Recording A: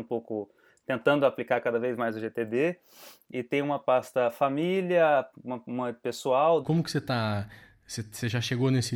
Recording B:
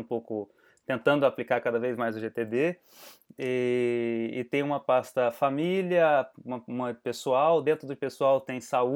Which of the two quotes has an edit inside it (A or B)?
A